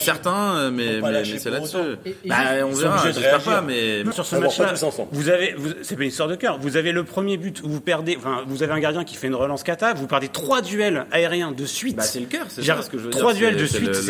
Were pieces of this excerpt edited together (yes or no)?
yes